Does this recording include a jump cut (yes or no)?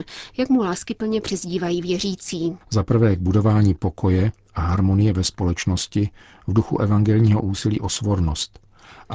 yes